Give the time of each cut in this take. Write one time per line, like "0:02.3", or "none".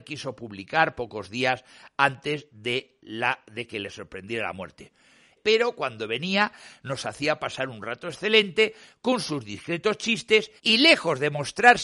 0:05.4
0:10.6